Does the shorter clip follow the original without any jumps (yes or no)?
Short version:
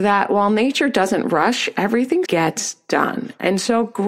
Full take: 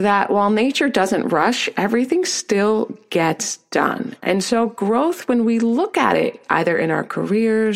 no